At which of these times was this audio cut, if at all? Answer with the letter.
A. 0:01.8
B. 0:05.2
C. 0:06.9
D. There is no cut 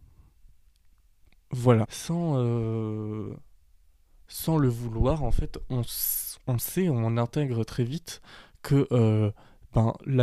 A